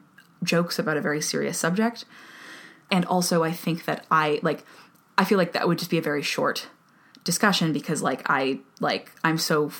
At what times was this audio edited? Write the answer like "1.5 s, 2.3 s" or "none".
2.9 s